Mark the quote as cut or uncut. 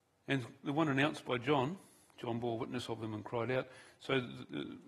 uncut